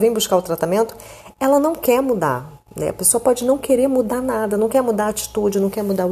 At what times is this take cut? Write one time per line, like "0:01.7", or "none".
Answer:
none